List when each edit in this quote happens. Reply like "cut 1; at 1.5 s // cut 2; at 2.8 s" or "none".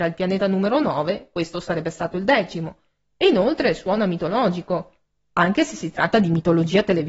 none